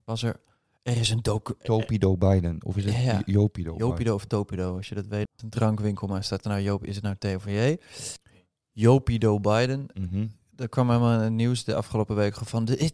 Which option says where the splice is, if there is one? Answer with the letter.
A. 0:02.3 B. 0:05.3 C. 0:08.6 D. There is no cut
B